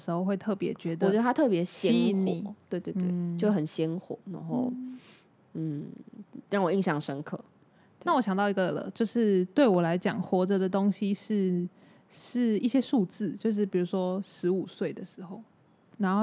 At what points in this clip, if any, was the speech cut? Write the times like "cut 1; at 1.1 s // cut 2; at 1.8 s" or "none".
none